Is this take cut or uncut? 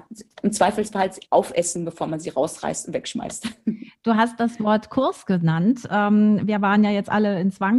uncut